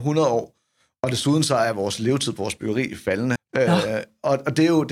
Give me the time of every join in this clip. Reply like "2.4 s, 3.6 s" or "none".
3.4 s